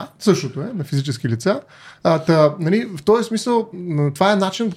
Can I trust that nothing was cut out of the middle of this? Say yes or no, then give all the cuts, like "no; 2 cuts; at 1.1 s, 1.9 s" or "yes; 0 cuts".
no; 1 cut; at 3.7 s